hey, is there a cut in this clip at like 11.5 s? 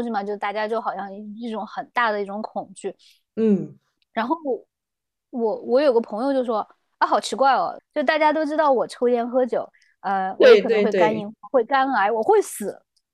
no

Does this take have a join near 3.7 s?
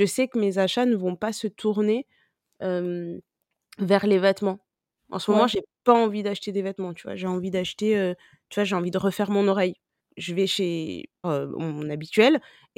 no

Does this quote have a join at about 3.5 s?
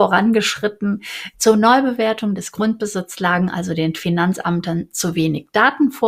no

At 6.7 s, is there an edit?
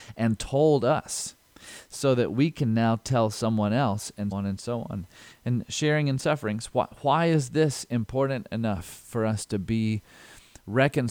no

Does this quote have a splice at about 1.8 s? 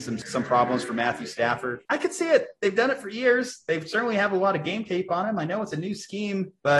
yes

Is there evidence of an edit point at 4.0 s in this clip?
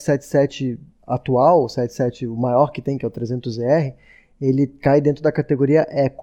no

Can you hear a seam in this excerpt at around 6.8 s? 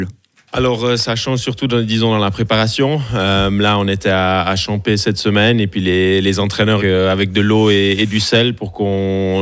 yes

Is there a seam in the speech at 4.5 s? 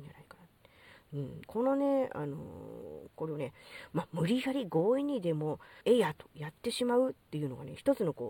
no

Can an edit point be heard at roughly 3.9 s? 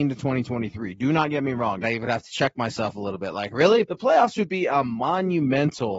yes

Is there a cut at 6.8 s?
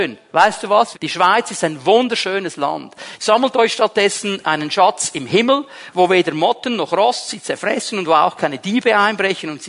no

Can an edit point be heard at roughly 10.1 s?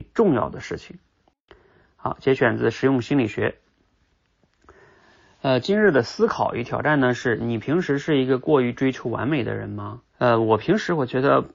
yes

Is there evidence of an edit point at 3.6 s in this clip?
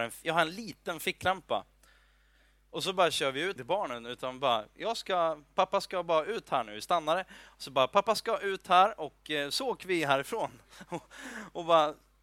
yes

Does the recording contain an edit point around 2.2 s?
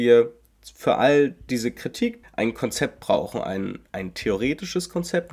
yes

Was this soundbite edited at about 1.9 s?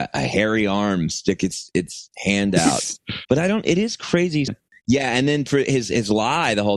no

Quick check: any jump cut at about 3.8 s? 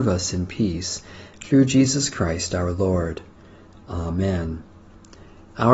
no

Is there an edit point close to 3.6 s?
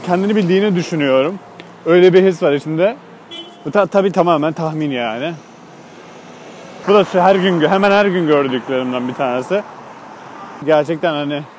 no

